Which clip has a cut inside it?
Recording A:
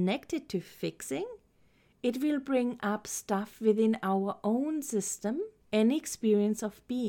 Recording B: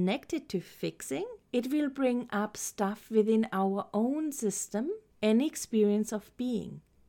B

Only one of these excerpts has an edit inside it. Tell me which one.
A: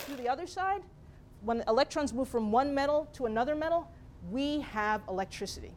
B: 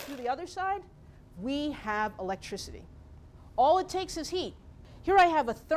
B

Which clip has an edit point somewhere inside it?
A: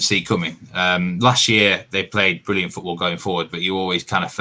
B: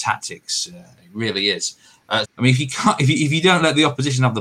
B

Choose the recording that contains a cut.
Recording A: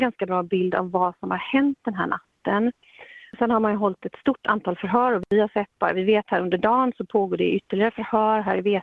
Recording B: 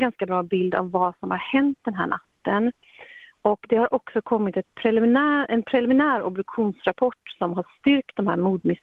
A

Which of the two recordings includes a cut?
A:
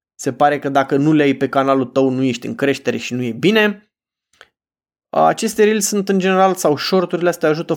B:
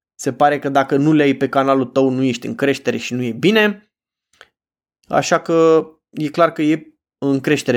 B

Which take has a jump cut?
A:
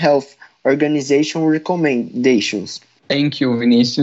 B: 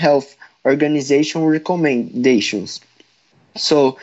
A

